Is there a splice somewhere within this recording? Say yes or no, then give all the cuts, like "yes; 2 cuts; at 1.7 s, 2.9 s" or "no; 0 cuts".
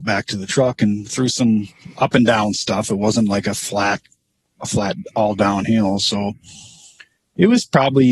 no; 0 cuts